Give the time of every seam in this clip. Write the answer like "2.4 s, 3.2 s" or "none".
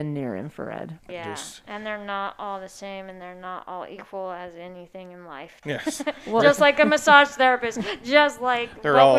1.1 s, 5.6 s